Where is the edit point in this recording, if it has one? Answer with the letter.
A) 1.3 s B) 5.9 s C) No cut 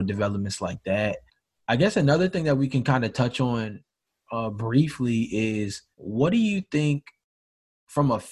B